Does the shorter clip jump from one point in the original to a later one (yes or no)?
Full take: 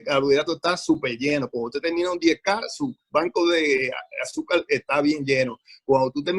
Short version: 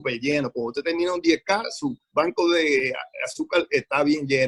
no